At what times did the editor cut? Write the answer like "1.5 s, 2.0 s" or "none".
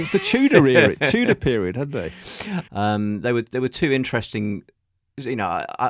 2.7 s